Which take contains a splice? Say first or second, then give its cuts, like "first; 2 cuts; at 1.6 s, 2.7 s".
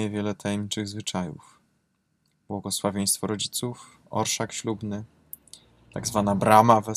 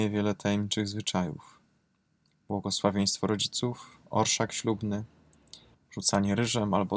second; 1 cut; at 5.7 s